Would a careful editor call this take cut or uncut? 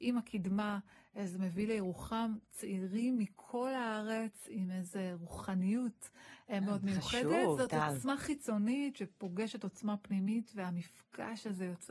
cut